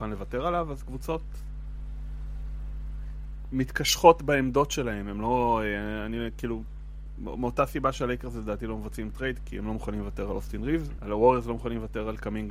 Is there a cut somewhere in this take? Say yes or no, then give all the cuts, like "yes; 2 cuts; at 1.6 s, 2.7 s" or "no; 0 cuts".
yes; 2 cuts; at 9.4 s, 11.0 s